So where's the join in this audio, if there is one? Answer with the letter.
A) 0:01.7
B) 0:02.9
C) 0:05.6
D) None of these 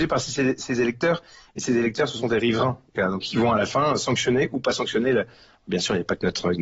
B